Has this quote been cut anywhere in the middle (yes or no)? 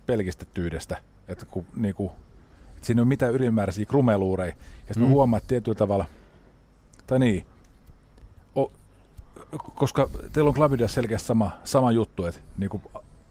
no